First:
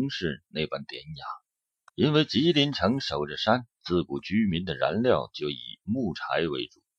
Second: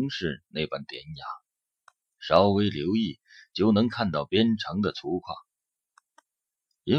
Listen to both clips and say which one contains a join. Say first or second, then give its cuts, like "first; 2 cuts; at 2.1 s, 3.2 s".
first; 2 cuts; at 1.9 s, 3.7 s